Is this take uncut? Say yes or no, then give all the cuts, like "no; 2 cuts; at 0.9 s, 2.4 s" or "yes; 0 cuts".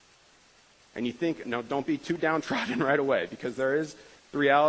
no; 1 cut; at 1.4 s